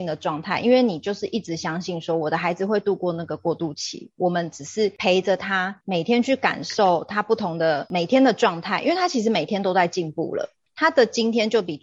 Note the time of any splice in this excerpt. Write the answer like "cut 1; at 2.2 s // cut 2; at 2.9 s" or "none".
none